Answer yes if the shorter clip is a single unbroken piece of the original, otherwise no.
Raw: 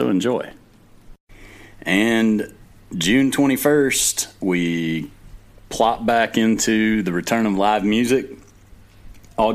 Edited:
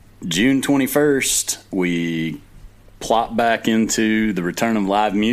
yes